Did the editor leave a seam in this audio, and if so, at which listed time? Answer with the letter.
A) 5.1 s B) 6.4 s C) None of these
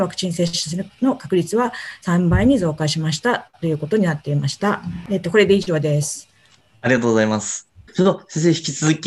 C